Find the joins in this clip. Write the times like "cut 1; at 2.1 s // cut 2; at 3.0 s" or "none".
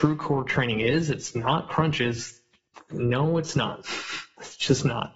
none